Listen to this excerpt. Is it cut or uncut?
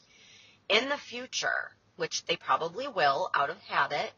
cut